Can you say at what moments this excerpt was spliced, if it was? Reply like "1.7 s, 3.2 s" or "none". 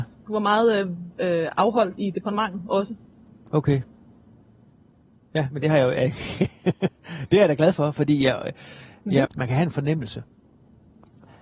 9.2 s